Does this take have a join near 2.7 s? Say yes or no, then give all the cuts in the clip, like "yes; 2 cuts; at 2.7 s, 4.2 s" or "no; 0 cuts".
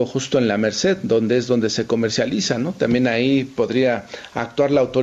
no; 0 cuts